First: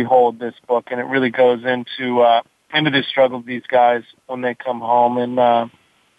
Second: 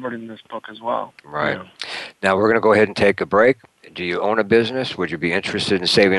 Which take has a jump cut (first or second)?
second